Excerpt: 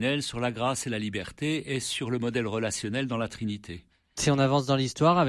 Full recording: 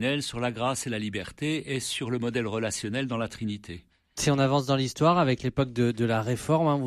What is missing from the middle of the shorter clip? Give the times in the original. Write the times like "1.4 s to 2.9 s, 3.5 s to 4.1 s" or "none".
none